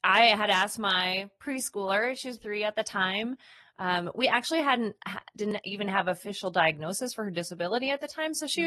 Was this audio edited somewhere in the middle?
yes; 1 cut; at 2.4 s

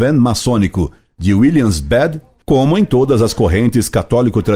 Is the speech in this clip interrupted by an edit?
yes; 1 cut; at 2.4 s

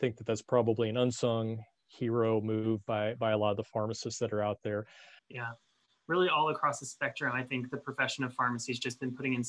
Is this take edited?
yes; 1 cut; at 5.2 s

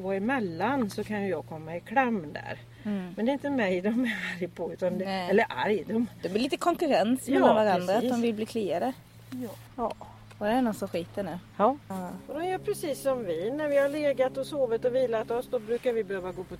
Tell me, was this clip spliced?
no; 0 cuts

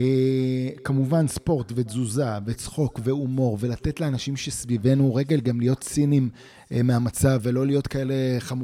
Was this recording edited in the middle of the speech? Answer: no; 0 cuts

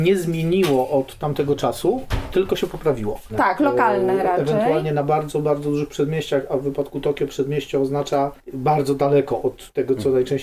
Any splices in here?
yes; 1 cut; at 3.3 s

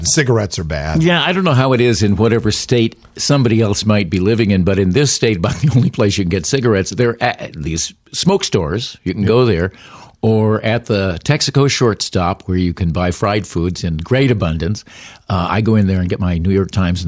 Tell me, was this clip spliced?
no; 0 cuts

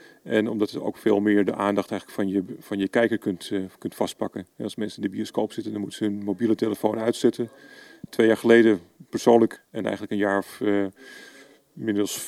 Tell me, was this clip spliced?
yes; 2 cuts; at 8.1 s, 9.6 s

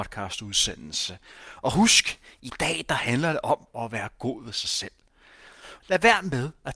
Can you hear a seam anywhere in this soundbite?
yes; 1 cut; at 5.8 s

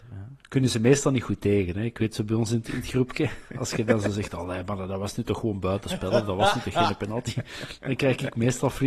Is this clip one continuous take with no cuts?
yes; 0 cuts

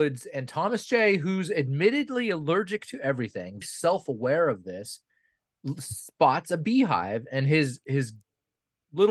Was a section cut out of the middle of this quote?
yes; 1 cut; at 3.6 s

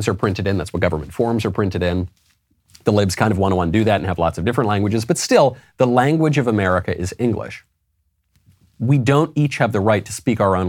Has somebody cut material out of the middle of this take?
no; 0 cuts

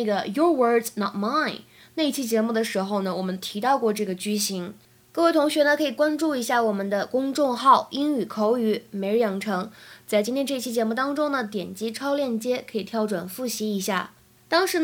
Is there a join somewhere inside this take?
no; 0 cuts

